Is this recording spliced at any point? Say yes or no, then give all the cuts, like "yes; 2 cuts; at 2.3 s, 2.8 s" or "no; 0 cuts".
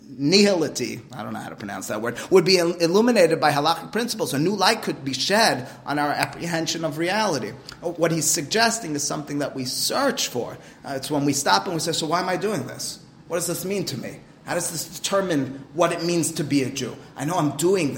no; 0 cuts